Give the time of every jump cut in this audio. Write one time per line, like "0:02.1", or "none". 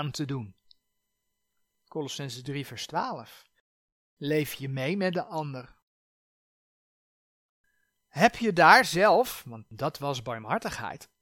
none